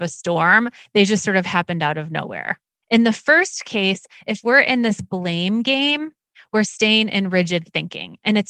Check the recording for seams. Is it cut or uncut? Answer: cut